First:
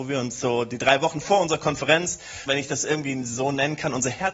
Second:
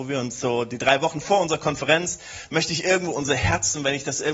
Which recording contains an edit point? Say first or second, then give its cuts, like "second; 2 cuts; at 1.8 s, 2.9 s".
first; 1 cut; at 2.5 s